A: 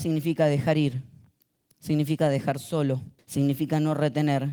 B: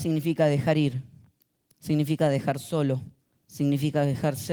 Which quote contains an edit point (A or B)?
A